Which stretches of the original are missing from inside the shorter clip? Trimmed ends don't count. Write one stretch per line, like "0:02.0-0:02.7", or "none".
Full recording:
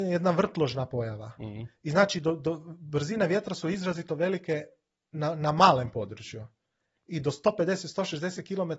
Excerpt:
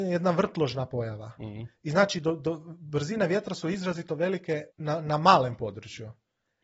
0:04.7-0:05.0

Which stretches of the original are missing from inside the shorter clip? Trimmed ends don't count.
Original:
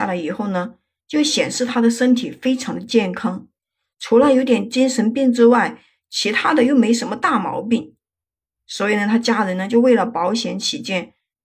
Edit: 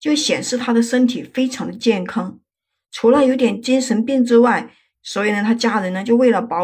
0:06.0-0:08.6

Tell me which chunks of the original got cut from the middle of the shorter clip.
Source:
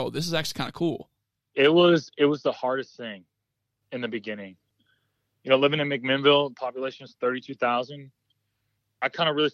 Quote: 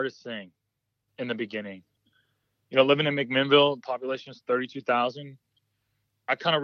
none

